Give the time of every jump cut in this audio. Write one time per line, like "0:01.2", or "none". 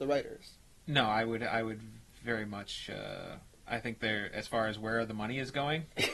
none